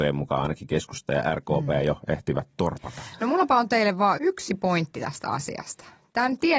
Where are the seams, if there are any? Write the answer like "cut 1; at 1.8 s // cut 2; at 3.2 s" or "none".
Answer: cut 1; at 4.2 s

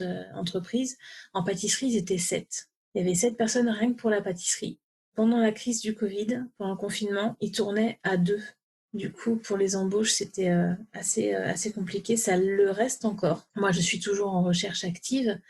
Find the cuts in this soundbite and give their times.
none

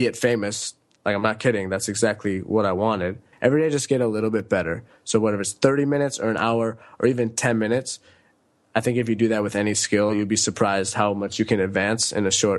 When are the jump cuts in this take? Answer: cut 1; at 3.3 s

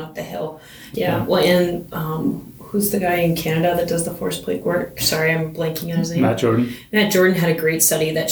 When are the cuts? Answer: cut 1; at 0.9 s

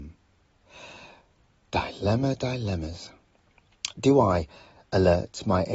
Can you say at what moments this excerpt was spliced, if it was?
none

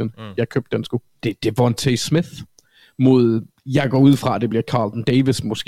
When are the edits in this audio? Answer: cut 1; at 1.2 s

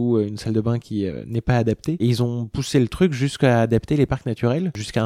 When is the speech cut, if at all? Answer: none

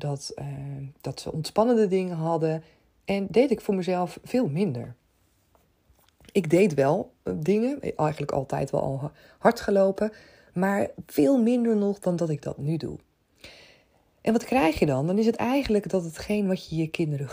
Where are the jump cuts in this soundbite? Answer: none

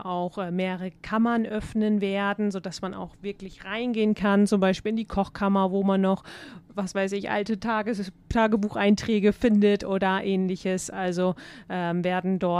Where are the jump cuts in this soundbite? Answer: none

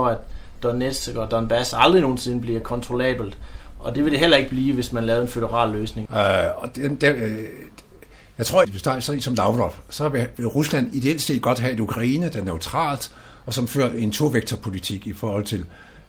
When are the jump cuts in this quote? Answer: cut 1; at 6.1 s // cut 2; at 8.6 s // cut 3; at 10.3 s

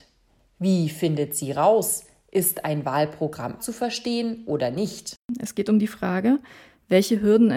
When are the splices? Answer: cut 1; at 3.6 s

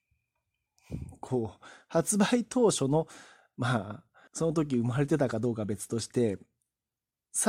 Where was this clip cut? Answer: cut 1; at 4.3 s

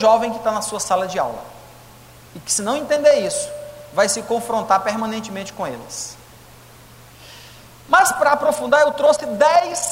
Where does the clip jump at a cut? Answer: none

